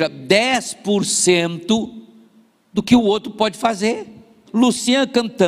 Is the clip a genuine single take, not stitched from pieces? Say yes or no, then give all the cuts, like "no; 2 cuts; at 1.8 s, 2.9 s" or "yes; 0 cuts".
no; 1 cut; at 4.5 s